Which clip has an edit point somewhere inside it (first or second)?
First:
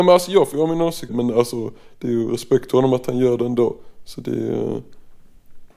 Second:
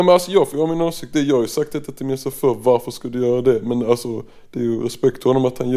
first